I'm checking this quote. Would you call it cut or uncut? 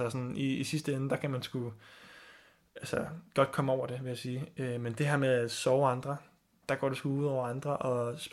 uncut